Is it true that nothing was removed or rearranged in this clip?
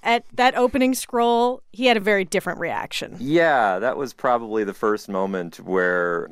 yes; 0 cuts

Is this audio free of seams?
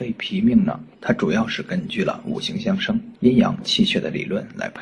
no; 2 cuts; at 0.9 s, 3.1 s

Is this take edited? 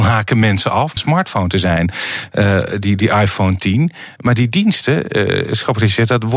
yes; 1 cut; at 1.0 s

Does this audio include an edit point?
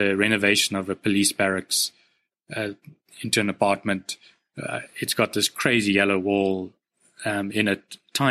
no; 0 cuts

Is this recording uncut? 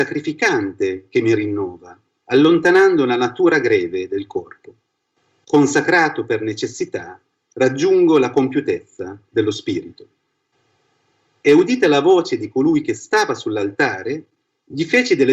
yes; 0 cuts

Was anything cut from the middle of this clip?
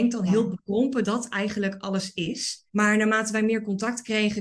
yes; 2 cuts; at 1.0 s, 2.7 s

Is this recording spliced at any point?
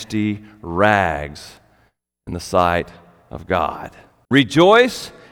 yes; 1 cut; at 4.2 s

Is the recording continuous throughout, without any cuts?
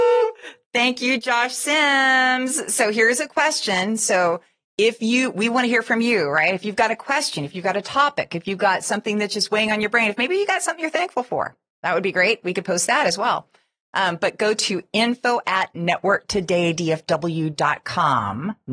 yes; 0 cuts

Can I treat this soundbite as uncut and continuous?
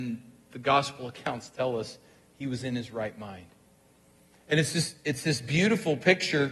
yes; 0 cuts

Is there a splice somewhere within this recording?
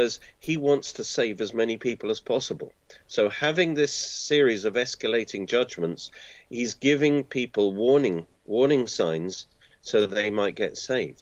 no; 0 cuts

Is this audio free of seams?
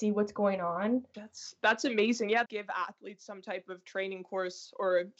no; 2 cuts; at 1.1 s, 2.5 s

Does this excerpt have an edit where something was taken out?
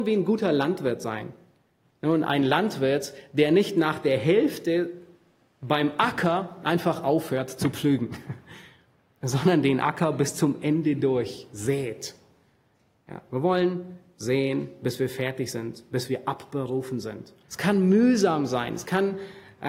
yes; 2 cuts; at 14.1 s, 17.4 s

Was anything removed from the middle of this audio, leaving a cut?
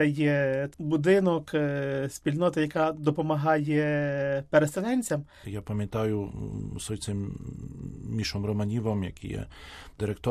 yes; 1 cut; at 5.4 s

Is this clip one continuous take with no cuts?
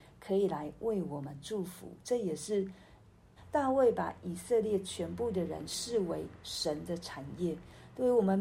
no; 1 cut; at 3.4 s

